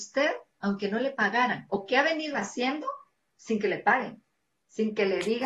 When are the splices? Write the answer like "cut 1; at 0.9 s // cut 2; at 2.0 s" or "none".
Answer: none

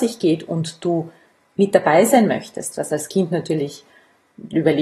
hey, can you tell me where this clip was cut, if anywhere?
none

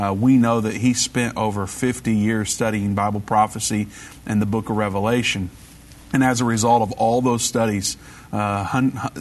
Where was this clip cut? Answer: none

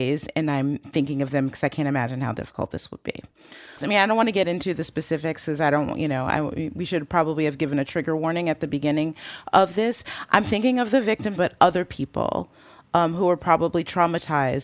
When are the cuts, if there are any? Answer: cut 1; at 3.8 s // cut 2; at 11.4 s

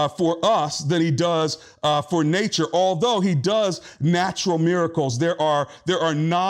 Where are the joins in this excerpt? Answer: none

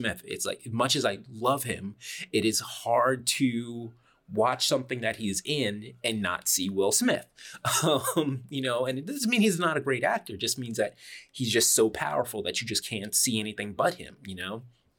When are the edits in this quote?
none

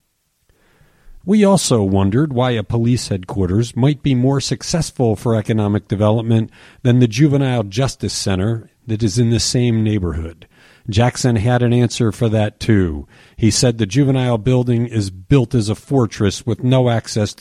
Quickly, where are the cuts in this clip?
cut 1; at 1.2 s

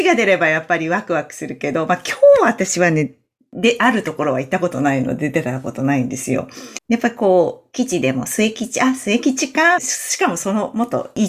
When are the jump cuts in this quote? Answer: cut 1; at 6.8 s // cut 2; at 9.8 s

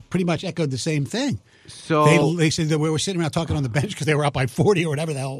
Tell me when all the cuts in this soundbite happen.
none

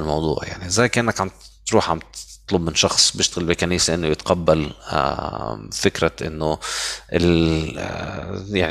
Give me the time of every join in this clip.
none

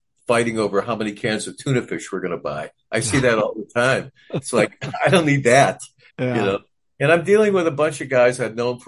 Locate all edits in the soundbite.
cut 1; at 6.1 s

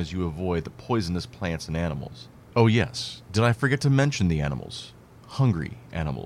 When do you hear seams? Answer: none

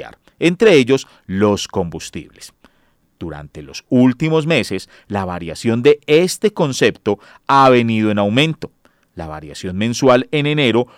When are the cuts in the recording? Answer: none

